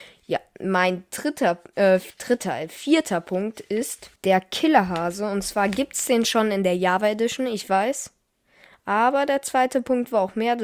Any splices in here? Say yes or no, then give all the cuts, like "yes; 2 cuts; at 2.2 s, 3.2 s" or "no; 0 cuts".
yes; 1 cut; at 4.2 s